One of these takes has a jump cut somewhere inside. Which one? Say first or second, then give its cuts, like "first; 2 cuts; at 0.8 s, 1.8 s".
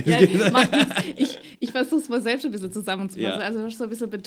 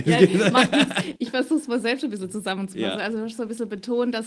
second; 1 cut; at 1.2 s